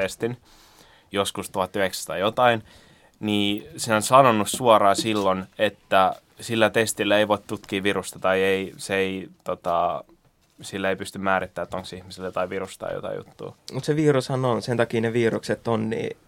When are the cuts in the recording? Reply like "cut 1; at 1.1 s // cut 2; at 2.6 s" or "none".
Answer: cut 1; at 13.6 s